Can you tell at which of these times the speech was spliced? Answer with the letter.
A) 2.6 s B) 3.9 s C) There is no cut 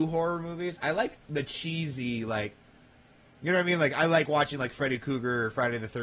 C